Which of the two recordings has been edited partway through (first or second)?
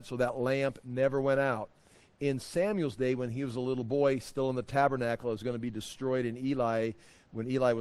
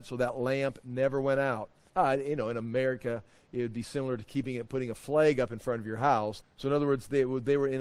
second